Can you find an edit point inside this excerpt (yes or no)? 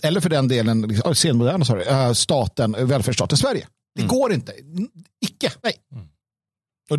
yes